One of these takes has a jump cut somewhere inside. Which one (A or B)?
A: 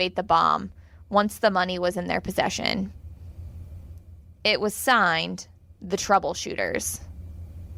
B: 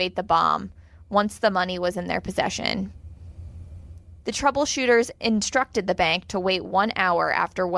B